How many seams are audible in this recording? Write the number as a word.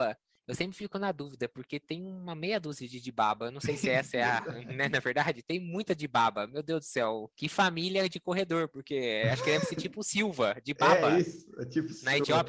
zero